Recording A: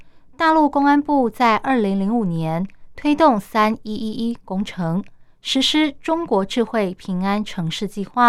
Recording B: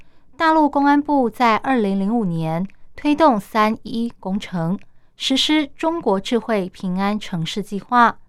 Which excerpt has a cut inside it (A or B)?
B